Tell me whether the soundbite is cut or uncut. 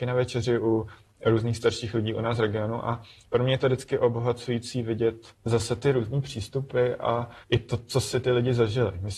cut